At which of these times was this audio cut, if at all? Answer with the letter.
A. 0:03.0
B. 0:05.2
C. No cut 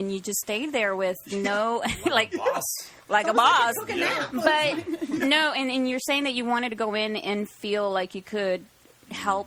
C